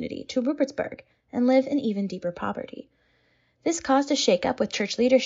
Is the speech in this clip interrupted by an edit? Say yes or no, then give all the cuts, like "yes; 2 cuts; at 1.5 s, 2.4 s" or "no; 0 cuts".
no; 0 cuts